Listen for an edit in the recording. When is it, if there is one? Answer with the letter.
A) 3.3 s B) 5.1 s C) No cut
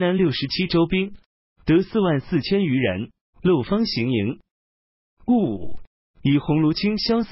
A